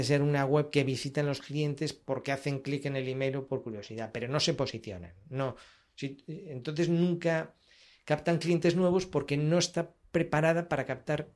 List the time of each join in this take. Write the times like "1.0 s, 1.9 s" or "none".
none